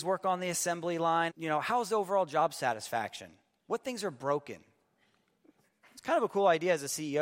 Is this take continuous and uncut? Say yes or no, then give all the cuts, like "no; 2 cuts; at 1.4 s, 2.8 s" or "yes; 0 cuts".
no; 1 cut; at 1.3 s